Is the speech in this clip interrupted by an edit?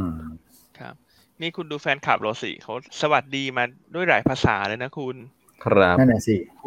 yes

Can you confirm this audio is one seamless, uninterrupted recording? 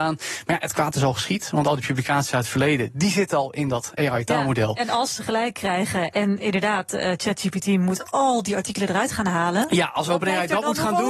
yes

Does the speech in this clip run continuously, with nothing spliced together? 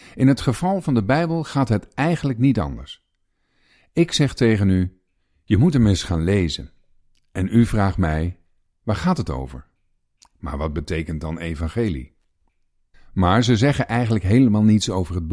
no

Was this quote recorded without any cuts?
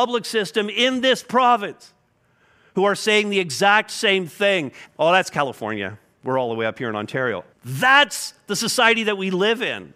no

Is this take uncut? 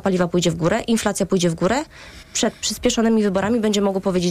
no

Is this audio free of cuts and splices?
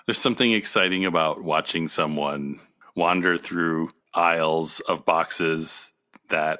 no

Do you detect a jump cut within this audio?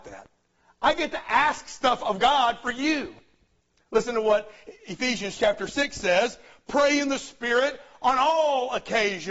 no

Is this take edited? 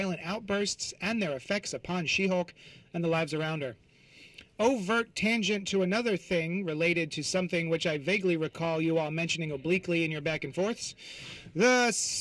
no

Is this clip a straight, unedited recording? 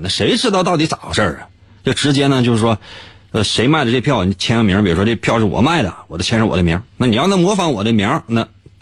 yes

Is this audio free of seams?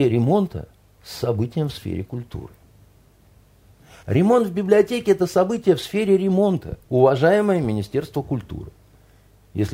no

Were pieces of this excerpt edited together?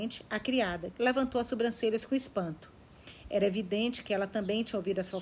yes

